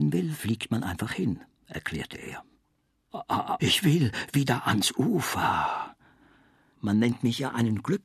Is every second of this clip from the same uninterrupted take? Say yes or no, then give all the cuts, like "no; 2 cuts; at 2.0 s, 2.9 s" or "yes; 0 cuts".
no; 2 cuts; at 3.6 s, 6.7 s